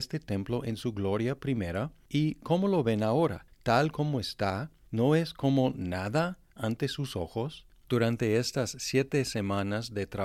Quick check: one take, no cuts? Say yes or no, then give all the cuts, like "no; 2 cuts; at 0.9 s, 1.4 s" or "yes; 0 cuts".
no; 1 cut; at 7.7 s